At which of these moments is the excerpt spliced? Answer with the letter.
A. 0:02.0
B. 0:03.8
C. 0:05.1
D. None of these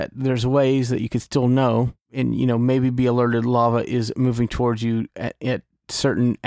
A